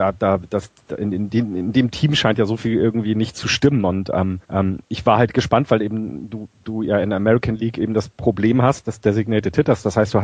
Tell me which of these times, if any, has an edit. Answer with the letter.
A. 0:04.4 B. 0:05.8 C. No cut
A